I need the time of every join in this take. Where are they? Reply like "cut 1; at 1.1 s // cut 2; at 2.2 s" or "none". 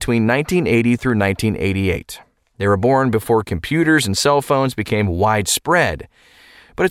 none